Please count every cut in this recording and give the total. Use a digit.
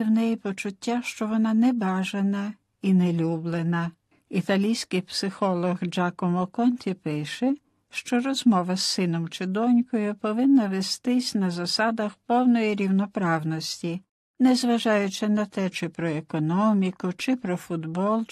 1